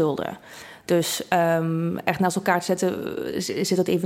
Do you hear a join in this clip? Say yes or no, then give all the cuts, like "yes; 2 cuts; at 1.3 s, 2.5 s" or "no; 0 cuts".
no; 0 cuts